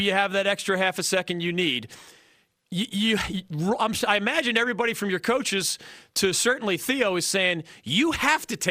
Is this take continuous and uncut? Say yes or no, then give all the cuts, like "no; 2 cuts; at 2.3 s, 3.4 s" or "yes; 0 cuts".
yes; 0 cuts